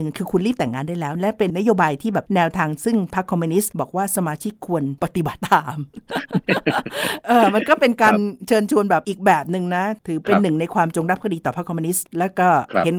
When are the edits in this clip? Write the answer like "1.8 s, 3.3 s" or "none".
1.5 s

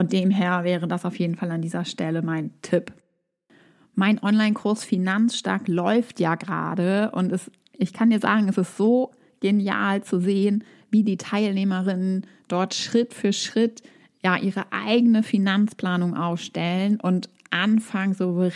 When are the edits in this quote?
none

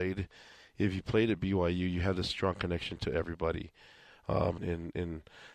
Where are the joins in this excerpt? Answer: 4.6 s

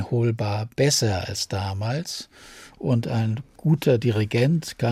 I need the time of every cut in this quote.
2.7 s

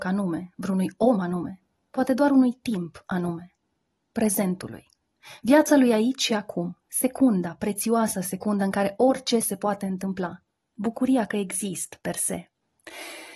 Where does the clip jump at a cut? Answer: none

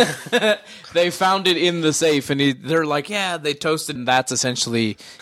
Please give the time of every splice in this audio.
4.0 s

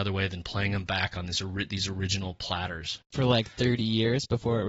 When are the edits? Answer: 3.1 s

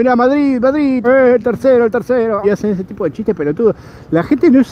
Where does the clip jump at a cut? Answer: 1.0 s, 2.4 s

